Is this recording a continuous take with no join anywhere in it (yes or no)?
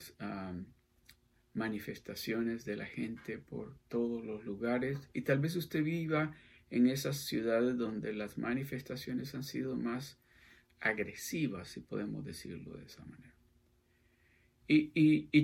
yes